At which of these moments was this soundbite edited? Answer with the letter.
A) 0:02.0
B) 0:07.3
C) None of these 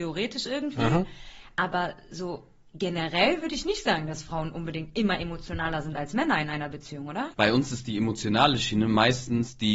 B